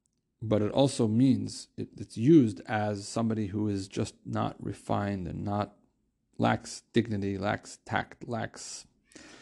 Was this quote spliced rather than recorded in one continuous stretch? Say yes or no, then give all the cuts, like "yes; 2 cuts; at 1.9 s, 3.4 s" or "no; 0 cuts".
no; 0 cuts